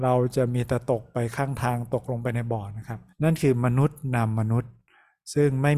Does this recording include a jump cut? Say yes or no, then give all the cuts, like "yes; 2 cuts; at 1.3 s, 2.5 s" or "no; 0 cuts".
yes; 1 cut; at 3.1 s